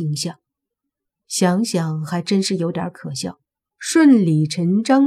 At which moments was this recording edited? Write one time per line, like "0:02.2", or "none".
0:01.2
0:03.7